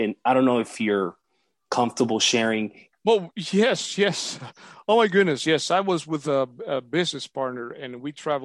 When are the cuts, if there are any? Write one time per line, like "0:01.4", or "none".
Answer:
0:02.9